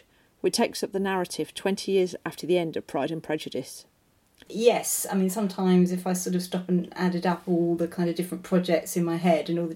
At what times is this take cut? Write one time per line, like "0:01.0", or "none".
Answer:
0:04.5